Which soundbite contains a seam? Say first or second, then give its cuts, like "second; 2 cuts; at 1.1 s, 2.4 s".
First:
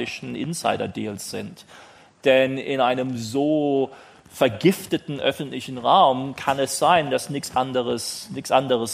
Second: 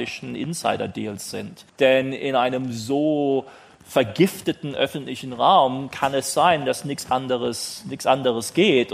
second; 1 cut; at 1.7 s